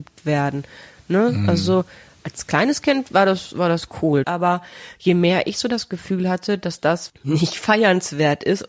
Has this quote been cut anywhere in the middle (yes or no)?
yes